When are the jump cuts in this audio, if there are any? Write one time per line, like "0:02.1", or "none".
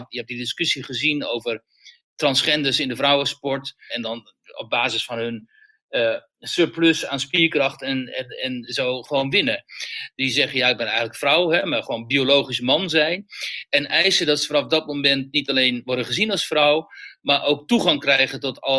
0:03.9
0:10.1